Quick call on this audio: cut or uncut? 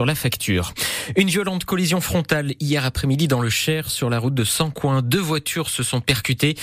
uncut